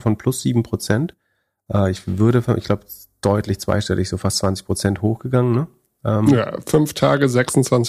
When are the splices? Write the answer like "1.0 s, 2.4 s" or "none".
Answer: none